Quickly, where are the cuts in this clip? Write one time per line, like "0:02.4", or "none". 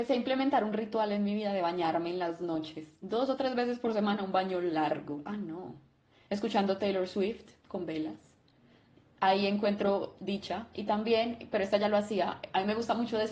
none